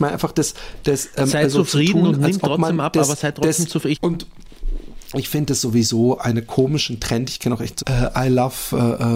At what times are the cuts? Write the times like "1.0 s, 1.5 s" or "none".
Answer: 3.9 s, 7.8 s